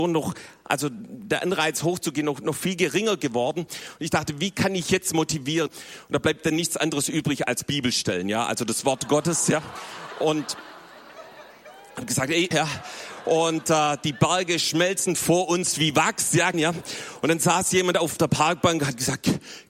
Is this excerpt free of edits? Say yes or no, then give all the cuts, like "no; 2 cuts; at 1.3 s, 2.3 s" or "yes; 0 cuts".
no; 3 cuts; at 5.7 s, 12.5 s, 16.5 s